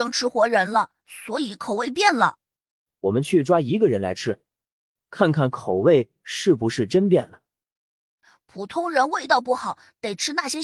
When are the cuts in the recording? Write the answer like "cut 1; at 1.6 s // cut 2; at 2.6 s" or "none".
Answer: none